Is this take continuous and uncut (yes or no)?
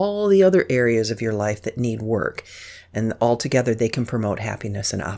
yes